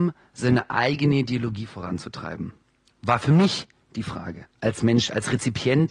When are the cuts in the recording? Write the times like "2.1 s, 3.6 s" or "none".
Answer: 2.9 s, 4.5 s